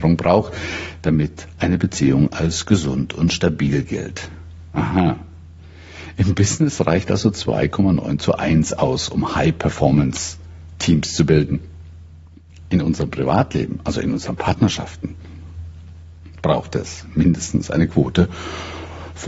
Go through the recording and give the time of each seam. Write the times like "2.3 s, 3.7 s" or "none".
none